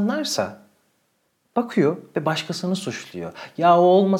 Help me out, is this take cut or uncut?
uncut